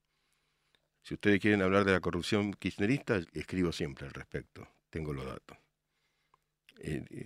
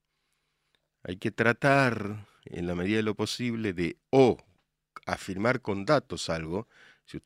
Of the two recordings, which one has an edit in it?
first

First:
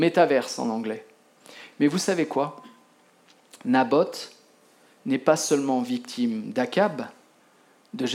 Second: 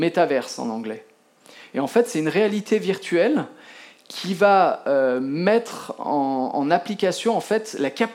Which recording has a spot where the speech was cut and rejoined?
first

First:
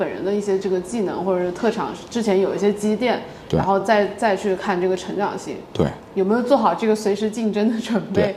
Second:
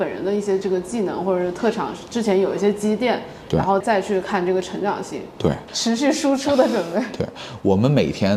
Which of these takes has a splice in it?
second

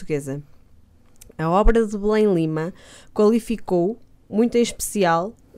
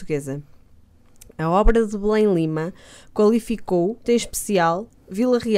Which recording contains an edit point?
second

